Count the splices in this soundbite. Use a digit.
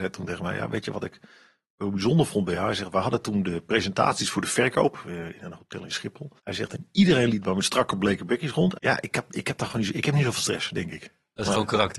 2